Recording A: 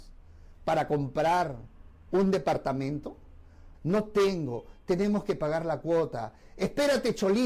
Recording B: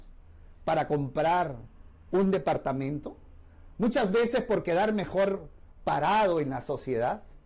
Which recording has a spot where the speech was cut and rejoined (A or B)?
A